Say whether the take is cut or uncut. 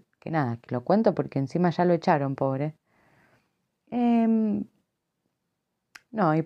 uncut